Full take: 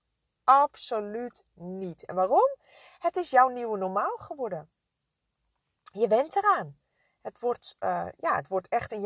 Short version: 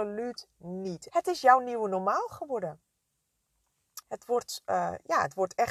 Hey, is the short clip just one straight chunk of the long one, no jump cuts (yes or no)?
no